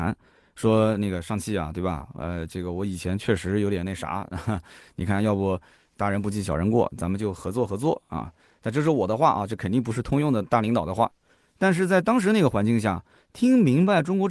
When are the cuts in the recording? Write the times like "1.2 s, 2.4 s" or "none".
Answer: none